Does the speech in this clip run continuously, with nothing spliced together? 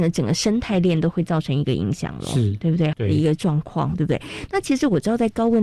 no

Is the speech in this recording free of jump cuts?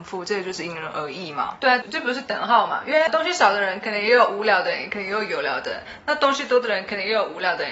yes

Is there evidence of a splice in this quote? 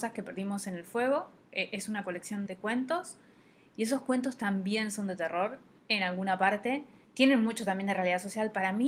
yes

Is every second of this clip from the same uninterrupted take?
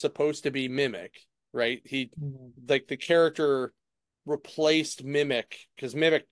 yes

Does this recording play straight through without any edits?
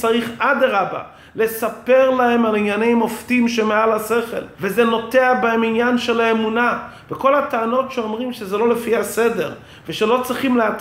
no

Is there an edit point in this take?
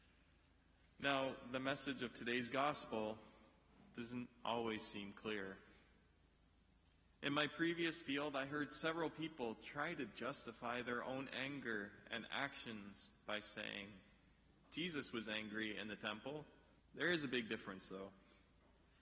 yes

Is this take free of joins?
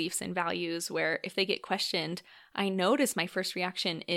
yes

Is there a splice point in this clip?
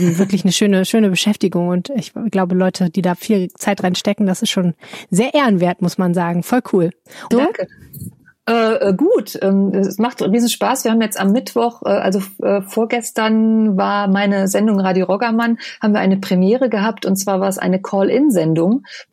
yes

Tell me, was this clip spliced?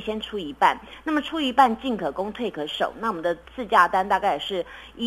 yes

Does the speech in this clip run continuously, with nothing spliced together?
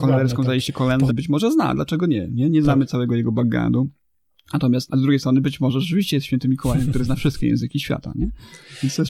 no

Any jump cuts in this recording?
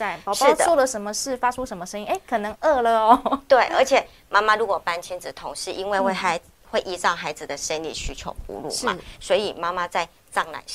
no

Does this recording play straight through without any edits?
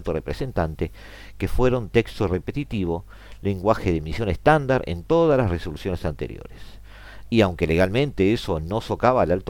yes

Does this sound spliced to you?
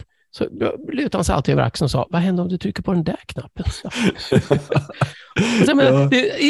yes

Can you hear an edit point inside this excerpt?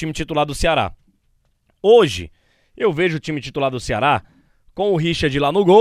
no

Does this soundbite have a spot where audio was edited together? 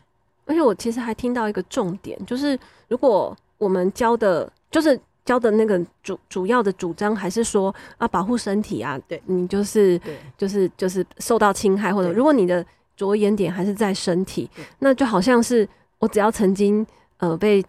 yes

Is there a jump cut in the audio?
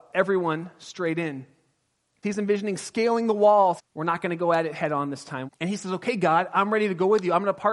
yes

